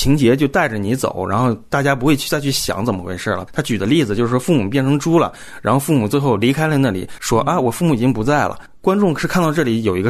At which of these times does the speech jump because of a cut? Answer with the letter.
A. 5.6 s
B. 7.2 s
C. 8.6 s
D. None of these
B